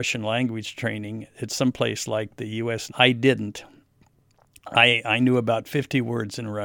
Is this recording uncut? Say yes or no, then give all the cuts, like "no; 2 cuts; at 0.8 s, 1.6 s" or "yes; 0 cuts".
no; 1 cut; at 2.9 s